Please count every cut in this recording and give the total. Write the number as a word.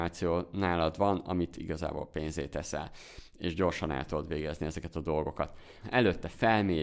one